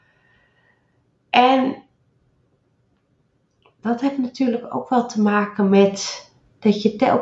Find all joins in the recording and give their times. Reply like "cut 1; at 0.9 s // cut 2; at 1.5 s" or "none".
none